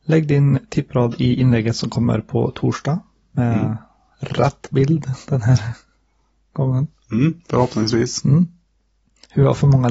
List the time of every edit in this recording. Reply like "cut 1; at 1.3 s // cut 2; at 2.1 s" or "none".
none